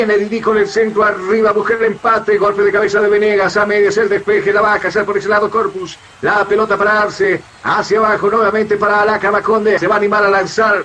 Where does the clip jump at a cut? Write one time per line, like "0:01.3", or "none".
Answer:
0:09.8